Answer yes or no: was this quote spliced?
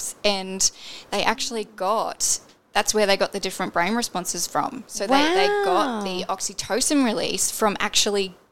no